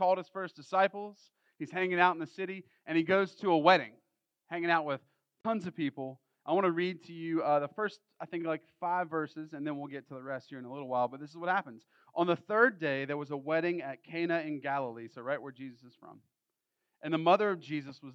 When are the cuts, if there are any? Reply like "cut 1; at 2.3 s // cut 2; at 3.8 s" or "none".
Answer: none